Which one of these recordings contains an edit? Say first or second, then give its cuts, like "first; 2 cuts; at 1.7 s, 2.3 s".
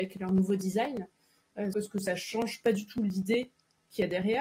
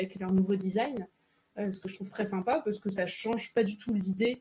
first; 1 cut; at 1.7 s